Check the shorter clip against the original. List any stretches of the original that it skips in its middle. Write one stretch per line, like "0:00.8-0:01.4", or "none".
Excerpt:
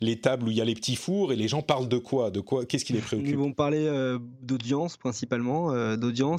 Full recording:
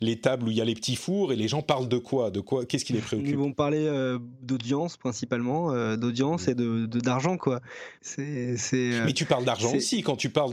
none